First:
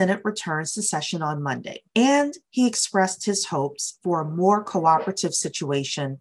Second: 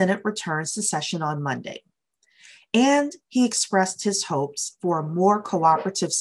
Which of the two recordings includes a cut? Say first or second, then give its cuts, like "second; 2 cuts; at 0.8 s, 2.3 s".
first; 1 cut; at 1.9 s